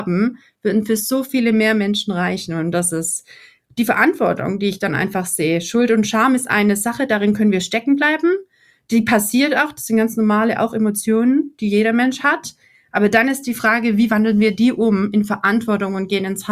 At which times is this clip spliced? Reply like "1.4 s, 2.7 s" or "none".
none